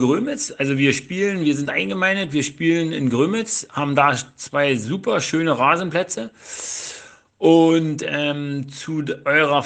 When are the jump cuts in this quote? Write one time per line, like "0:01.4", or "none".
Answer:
none